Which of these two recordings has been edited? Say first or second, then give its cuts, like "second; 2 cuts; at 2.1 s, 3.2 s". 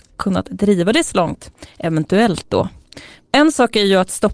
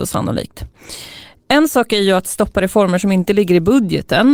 first; 1 cut; at 3.2 s